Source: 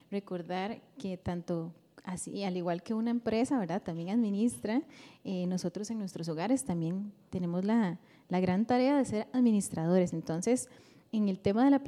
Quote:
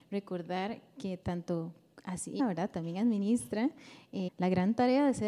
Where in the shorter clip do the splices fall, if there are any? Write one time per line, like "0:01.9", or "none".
0:02.4
0:04.3